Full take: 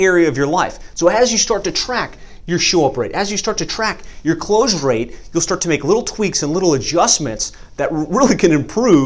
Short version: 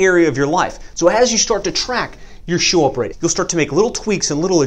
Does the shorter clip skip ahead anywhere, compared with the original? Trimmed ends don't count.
yes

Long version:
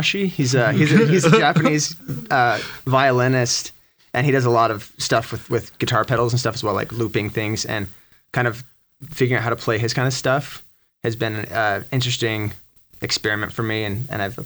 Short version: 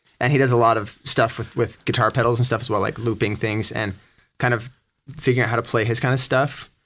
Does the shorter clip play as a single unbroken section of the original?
yes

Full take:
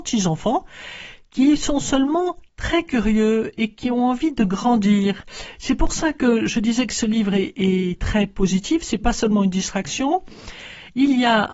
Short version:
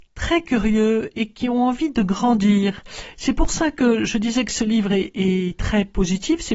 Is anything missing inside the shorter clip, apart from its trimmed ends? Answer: no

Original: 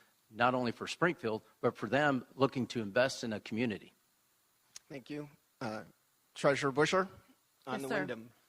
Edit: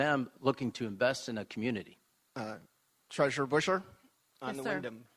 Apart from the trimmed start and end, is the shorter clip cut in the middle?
yes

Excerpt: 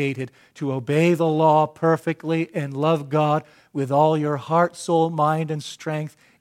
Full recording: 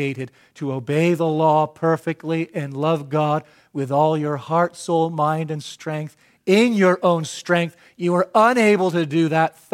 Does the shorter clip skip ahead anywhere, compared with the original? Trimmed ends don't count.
no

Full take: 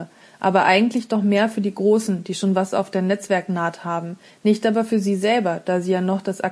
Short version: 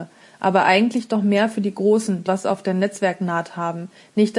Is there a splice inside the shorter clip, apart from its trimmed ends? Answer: yes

